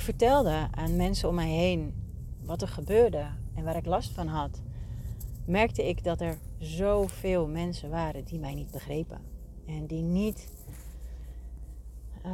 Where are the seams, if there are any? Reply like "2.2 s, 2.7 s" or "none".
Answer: none